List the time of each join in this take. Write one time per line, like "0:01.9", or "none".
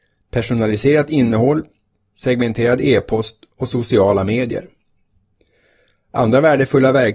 none